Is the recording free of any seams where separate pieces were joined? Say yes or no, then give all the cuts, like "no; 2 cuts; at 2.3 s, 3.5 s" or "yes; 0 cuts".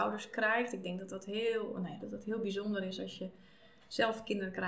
no; 1 cut; at 2.0 s